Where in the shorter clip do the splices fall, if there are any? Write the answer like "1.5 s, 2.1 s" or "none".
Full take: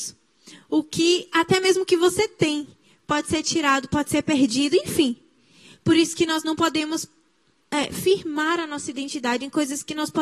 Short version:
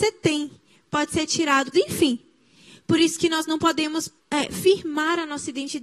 1.7 s, 4.2 s